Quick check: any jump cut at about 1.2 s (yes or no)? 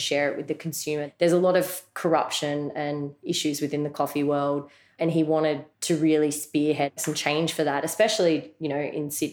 no